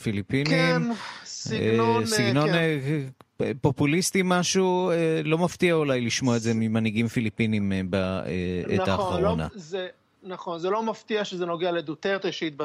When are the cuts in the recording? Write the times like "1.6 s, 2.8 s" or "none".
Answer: none